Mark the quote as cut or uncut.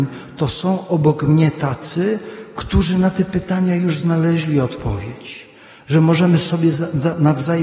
uncut